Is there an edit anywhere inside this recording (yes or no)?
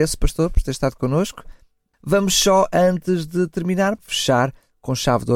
yes